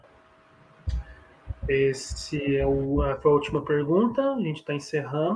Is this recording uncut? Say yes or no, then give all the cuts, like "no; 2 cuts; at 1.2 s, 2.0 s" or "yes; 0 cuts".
yes; 0 cuts